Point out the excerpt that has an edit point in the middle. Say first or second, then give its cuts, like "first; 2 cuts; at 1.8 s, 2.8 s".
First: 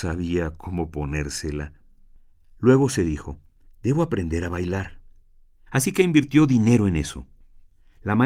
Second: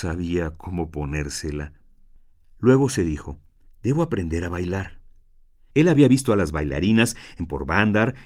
first; 1 cut; at 5.7 s